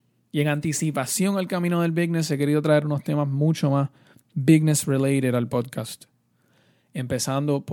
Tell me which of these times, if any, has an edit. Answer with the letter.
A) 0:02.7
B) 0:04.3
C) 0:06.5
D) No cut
D